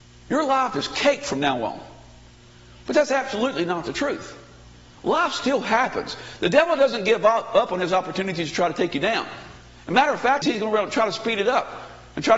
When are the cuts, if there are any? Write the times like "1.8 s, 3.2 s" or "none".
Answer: 10.4 s